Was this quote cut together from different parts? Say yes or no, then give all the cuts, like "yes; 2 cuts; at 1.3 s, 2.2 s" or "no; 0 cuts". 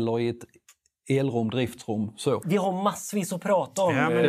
yes; 1 cut; at 2.4 s